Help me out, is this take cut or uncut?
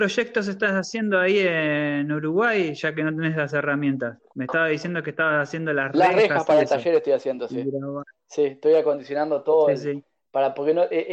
uncut